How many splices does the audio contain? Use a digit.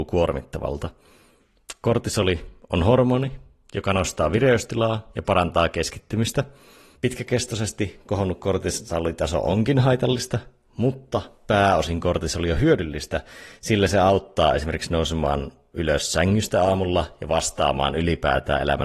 1